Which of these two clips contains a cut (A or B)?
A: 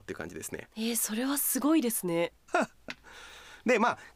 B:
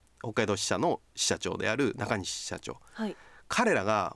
A